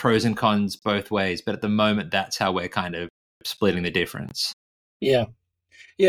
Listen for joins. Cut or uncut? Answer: uncut